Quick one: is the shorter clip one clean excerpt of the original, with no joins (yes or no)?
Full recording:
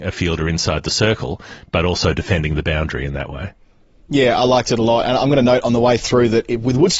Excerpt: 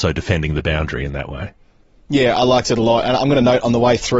yes